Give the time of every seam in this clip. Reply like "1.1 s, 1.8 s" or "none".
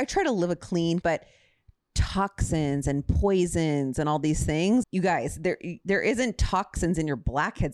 1.0 s, 4.8 s